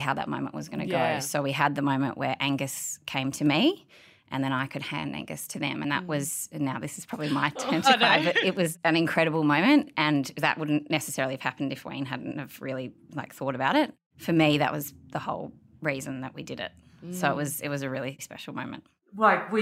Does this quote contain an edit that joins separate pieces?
no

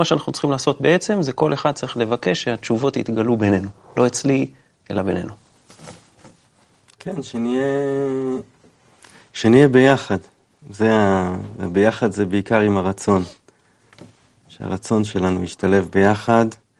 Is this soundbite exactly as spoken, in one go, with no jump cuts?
yes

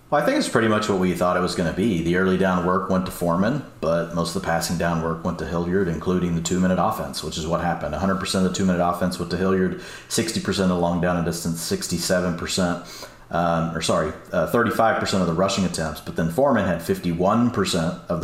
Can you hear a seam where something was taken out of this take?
no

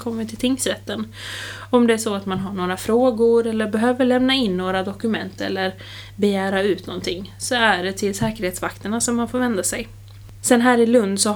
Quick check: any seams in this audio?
yes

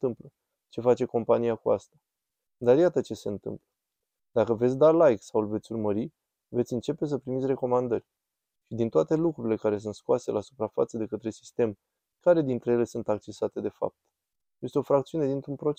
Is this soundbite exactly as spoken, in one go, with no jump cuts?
yes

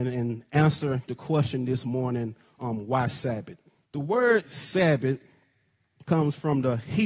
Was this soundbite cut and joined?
yes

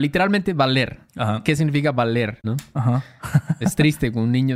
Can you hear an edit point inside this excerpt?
yes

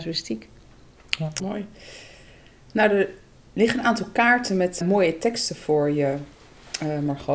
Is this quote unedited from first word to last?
no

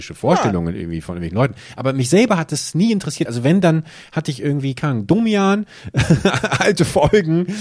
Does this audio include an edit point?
no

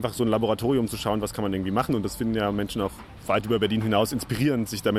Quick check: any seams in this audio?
no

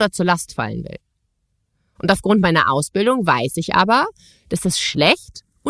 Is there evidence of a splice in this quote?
no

